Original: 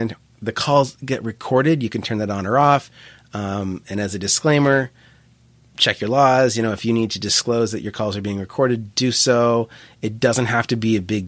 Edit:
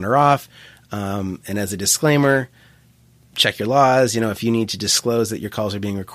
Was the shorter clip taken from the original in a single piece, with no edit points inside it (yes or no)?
yes